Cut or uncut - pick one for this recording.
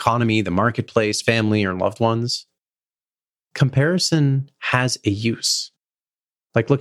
cut